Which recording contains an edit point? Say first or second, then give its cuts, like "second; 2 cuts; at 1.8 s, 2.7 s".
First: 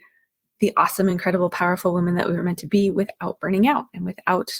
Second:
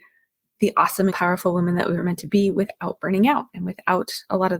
second; 1 cut; at 1.1 s